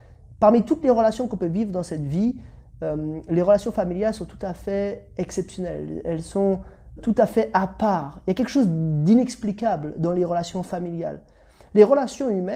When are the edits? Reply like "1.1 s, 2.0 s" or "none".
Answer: 7.0 s